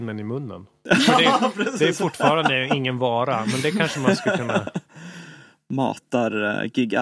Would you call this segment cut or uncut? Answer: uncut